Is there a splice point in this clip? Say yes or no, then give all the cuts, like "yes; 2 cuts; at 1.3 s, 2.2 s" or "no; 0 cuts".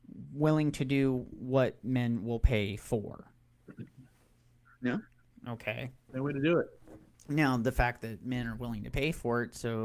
no; 0 cuts